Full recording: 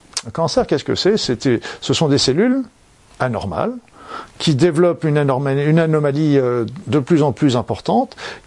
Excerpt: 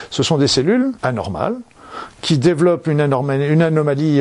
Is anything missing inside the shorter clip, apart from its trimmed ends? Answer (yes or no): yes